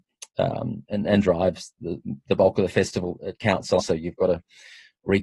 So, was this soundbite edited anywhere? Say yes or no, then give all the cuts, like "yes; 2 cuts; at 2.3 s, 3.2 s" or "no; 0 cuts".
yes; 1 cut; at 3.8 s